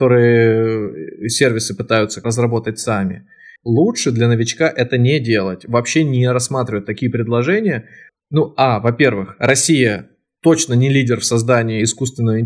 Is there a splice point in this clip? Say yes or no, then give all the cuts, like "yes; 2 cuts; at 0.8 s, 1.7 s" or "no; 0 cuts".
yes; 3 cuts; at 2.2 s, 3.6 s, 8.1 s